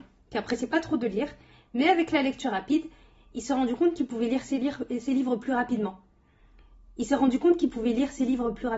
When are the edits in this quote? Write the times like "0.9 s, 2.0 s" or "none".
none